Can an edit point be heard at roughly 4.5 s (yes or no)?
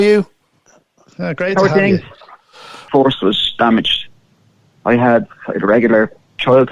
no